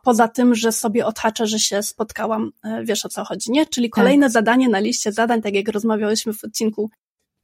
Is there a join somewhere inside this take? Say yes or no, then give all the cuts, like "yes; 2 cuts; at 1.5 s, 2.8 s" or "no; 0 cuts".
no; 0 cuts